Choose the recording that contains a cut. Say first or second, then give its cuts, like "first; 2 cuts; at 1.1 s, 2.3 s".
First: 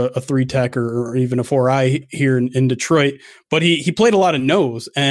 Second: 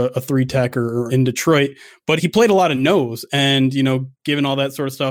second; 3 cuts; at 1.1 s, 2.2 s, 4.1 s